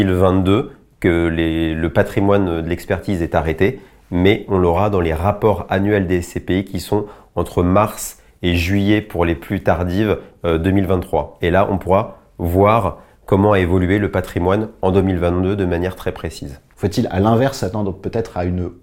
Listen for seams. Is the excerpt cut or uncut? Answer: uncut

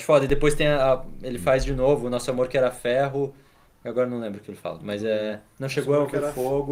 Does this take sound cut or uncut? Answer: uncut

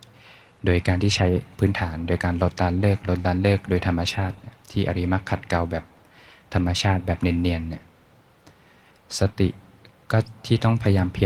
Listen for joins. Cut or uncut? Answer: uncut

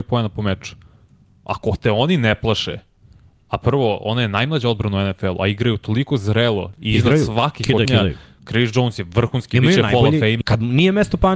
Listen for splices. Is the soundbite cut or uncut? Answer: cut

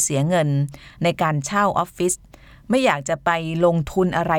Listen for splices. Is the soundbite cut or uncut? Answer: uncut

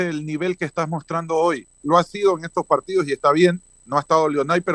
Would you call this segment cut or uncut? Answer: cut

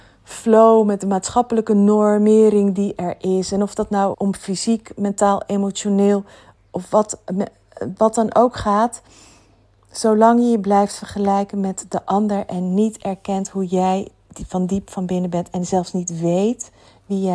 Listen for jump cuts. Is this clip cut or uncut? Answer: cut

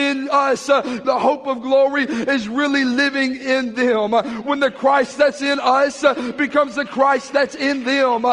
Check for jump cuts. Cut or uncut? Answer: cut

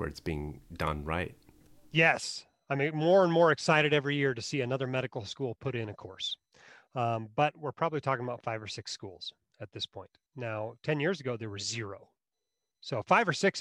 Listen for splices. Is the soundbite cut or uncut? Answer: uncut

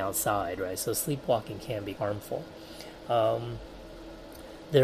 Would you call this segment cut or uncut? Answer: cut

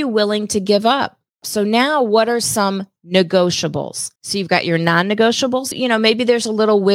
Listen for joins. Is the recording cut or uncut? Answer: cut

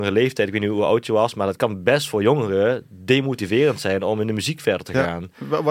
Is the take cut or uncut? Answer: uncut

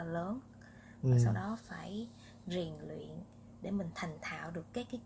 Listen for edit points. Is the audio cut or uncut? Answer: uncut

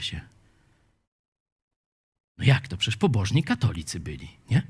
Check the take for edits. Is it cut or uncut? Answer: uncut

